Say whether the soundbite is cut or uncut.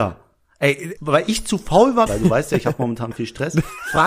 cut